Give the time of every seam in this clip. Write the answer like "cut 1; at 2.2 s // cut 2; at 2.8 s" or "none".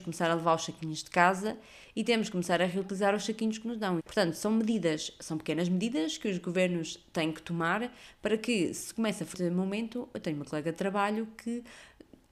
cut 1; at 4.0 s